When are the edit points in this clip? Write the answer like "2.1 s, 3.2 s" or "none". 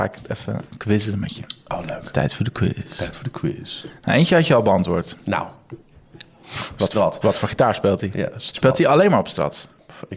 none